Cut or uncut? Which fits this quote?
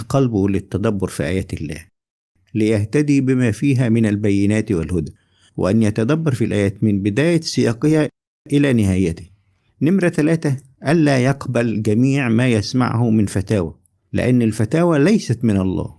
uncut